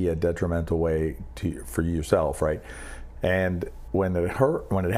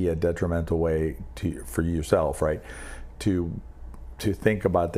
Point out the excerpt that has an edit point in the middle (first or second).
first